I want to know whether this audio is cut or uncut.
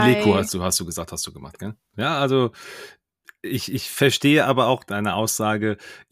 cut